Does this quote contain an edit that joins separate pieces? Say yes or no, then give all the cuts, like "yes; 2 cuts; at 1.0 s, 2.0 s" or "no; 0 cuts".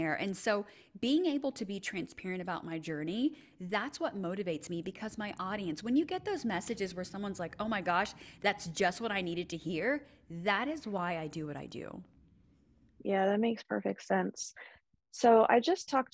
no; 0 cuts